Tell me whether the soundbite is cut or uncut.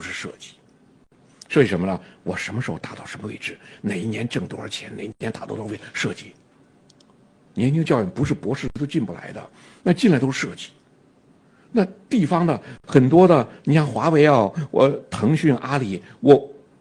cut